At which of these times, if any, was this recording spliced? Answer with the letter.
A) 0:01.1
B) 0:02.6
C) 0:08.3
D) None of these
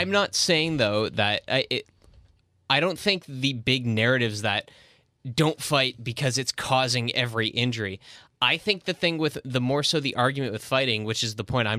D